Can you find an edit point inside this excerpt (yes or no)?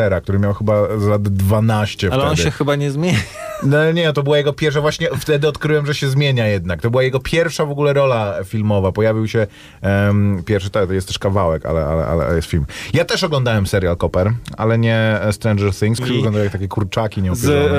yes